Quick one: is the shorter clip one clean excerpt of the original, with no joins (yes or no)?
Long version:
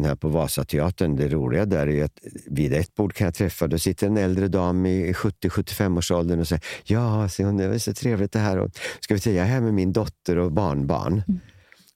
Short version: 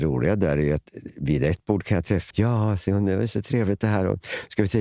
no